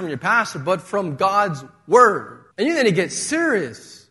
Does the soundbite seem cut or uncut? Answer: cut